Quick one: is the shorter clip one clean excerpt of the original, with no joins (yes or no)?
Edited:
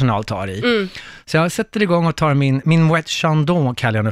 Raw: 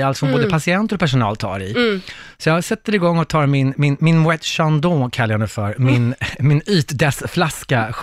no